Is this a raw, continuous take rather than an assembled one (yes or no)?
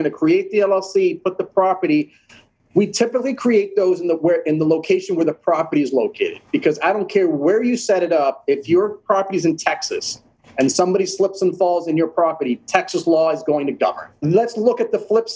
no